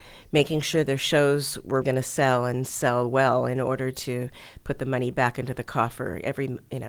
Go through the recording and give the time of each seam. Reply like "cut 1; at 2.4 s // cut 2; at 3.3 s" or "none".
cut 1; at 1.8 s